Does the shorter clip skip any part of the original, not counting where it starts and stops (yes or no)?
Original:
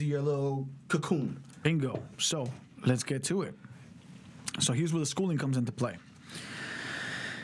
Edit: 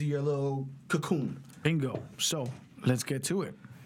no